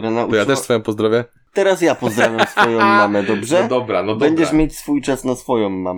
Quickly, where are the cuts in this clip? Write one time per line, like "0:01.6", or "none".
none